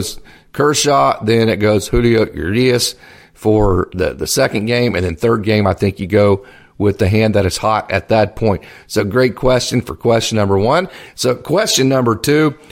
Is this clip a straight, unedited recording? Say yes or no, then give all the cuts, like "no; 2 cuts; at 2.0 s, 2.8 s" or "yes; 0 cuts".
yes; 0 cuts